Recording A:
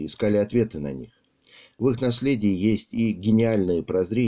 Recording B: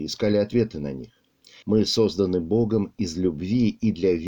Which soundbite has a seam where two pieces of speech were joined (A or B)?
B